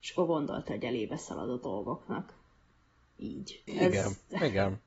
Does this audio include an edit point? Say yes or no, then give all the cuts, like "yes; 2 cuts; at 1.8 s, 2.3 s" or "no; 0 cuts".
yes; 1 cut; at 3.7 s